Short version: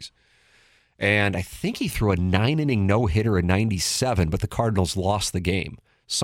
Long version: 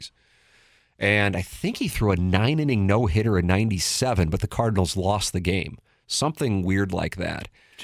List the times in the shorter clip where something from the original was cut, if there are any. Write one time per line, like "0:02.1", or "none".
none